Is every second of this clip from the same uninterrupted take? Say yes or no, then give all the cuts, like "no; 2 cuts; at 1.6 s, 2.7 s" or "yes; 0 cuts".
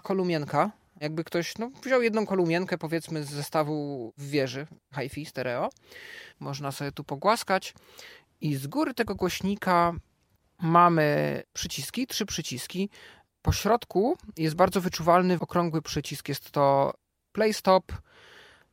no; 2 cuts; at 6.3 s, 15.4 s